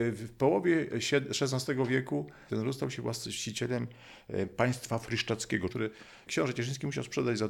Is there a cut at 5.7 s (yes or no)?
yes